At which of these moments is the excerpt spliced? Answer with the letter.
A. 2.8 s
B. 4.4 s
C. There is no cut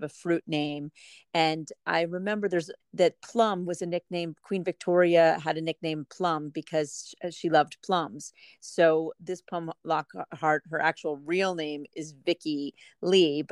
A